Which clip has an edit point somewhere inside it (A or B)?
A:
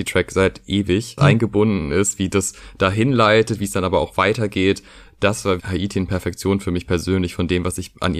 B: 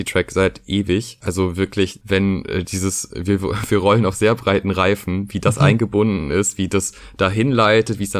A